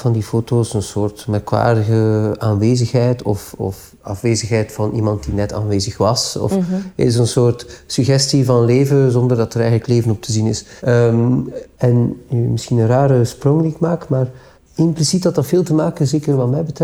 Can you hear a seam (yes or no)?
yes